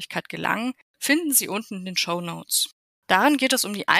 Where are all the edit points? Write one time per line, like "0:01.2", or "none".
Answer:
0:03.0